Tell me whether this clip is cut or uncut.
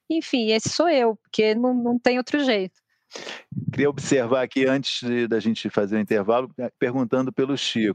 cut